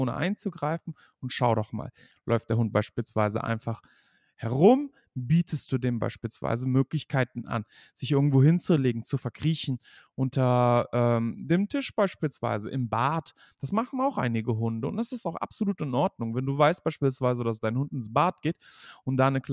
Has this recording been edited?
no; 0 cuts

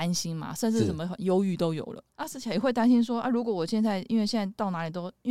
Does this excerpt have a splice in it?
yes; 1 cut; at 2.1 s

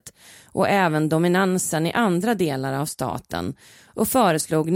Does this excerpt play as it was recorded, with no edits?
yes; 0 cuts

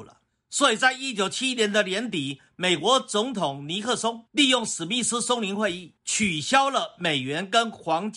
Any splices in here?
no; 0 cuts

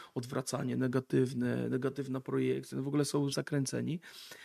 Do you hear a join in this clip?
yes; 1 cut; at 3.3 s

